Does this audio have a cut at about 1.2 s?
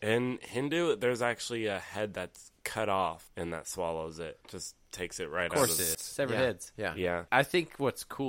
no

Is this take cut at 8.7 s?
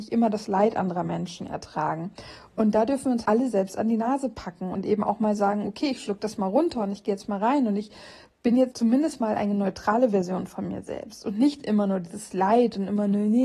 yes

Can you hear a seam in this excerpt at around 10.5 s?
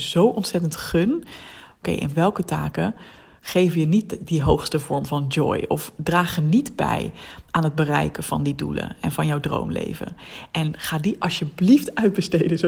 no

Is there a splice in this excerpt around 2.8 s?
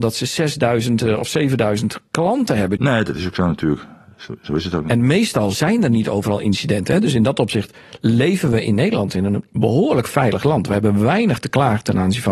yes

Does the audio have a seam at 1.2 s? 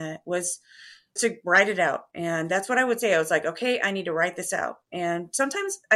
yes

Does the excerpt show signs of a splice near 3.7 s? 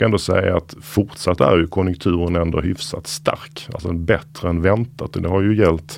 no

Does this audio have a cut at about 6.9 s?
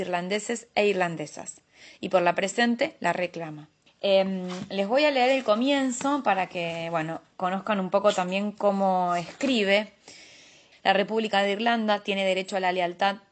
no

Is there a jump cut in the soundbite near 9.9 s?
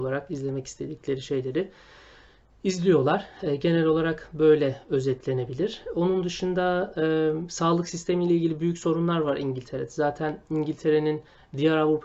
no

